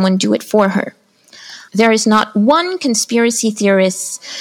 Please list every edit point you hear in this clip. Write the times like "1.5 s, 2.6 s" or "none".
1.7 s